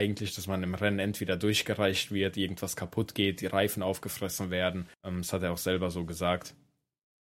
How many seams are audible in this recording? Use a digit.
1